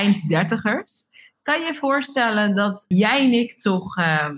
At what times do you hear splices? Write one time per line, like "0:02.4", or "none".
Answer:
0:02.9